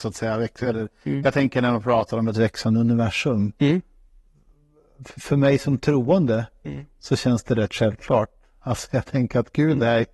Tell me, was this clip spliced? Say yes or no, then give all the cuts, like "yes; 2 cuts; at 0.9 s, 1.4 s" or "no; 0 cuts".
no; 0 cuts